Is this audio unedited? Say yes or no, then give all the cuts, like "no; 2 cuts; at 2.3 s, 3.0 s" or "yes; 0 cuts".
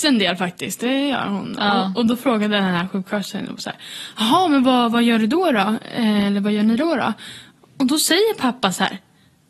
yes; 0 cuts